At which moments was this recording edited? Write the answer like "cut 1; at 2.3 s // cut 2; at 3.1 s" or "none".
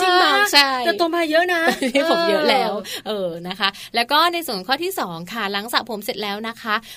none

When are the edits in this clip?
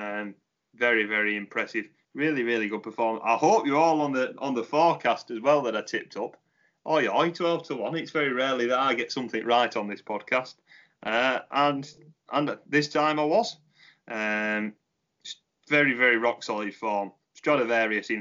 cut 1; at 2.0 s

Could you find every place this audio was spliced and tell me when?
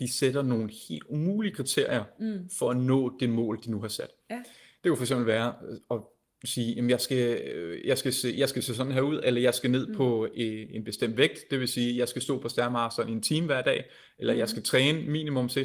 none

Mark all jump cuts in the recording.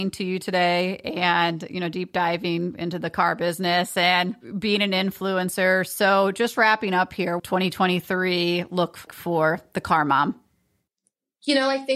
cut 1; at 7.4 s // cut 2; at 9.1 s

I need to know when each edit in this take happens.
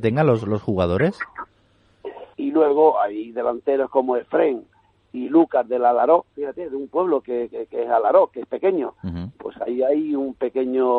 cut 1; at 2.3 s // cut 2; at 7.5 s

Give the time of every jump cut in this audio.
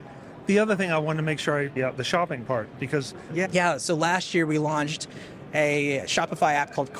cut 1; at 1.8 s // cut 2; at 3.4 s

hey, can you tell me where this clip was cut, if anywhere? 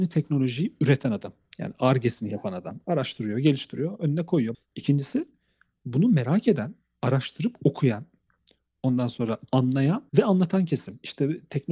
cut 1; at 4.5 s // cut 2; at 10.1 s

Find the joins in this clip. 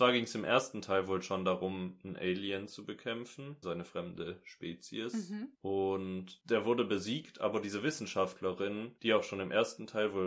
cut 1; at 3.6 s

